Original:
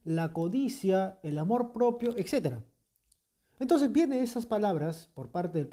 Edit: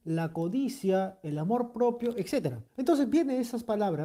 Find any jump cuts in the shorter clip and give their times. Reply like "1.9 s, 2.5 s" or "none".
2.7 s